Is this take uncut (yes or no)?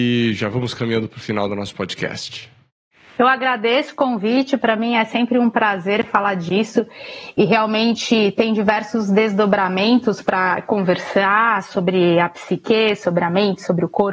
yes